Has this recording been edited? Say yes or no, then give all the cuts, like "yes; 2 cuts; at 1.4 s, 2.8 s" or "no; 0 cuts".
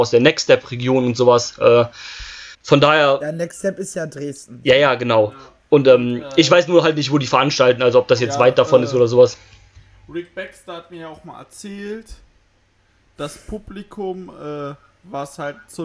yes; 1 cut; at 2.5 s